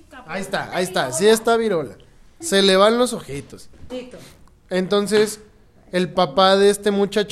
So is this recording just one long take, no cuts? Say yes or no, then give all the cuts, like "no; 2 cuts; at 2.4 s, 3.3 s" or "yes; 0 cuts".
no; 2 cuts; at 2.4 s, 3.9 s